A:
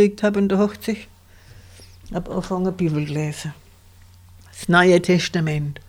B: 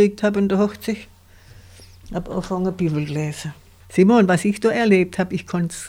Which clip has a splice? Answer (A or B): B